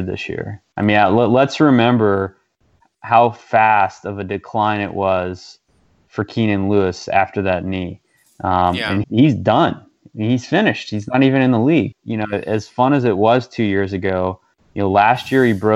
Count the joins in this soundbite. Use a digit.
2